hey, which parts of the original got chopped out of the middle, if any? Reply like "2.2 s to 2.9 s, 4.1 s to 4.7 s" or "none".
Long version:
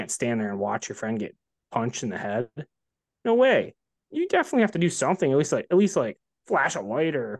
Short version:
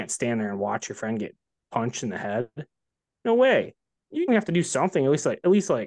4.3 s to 4.5 s